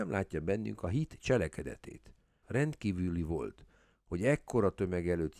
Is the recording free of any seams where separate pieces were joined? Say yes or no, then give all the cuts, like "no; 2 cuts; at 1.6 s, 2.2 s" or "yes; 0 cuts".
no; 1 cut; at 2.4 s